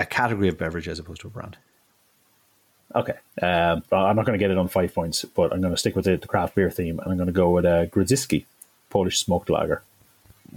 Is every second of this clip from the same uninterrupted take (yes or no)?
no